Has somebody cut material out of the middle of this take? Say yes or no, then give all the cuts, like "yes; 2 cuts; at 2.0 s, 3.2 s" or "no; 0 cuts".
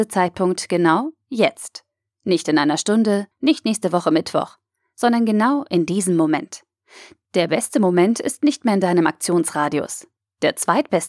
yes; 1 cut; at 3.3 s